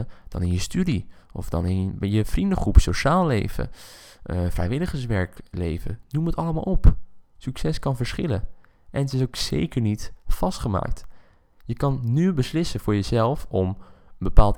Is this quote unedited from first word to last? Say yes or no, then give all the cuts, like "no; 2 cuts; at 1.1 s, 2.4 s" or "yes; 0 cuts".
yes; 0 cuts